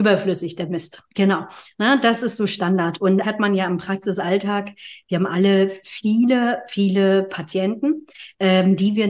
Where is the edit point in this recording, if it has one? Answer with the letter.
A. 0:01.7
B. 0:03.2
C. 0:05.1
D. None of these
B